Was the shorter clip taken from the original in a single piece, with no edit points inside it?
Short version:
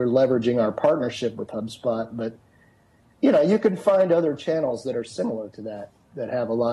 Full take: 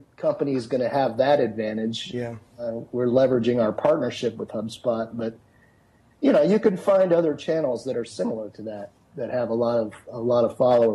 yes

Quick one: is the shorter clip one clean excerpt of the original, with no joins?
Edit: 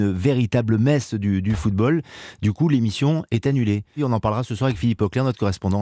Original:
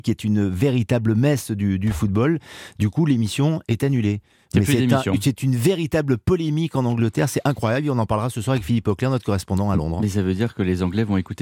no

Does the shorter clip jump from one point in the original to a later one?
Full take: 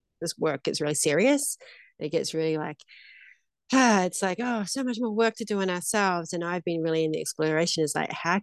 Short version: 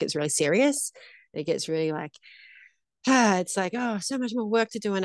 no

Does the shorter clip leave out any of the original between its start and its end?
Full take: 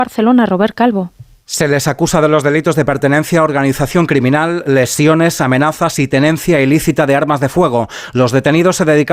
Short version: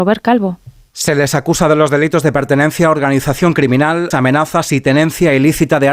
yes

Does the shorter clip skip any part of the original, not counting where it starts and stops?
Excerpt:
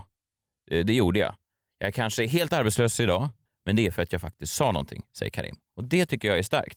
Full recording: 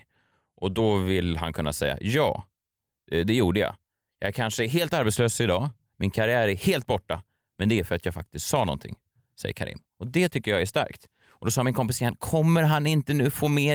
yes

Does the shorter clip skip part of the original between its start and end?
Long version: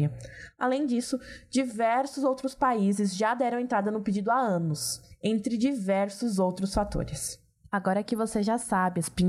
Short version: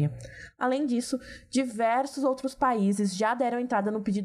no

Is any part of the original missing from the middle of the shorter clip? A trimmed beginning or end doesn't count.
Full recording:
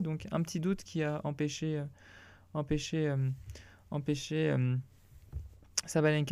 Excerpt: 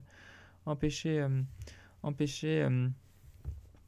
no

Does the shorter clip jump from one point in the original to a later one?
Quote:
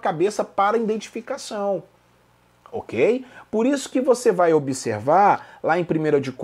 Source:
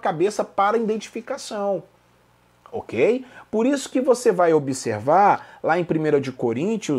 no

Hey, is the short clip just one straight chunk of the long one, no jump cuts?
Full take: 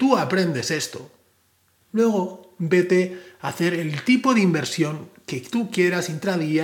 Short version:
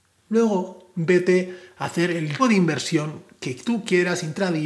no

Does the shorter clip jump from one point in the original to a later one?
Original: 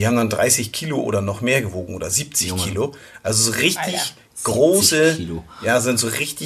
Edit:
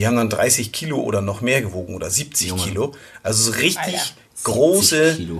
no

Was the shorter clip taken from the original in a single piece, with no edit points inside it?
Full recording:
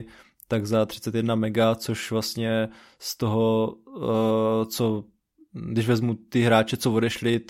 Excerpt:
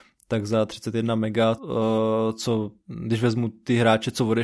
no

